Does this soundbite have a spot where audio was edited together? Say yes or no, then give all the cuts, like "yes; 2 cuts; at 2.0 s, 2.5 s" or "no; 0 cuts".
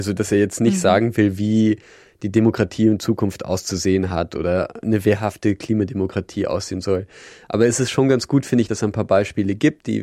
no; 0 cuts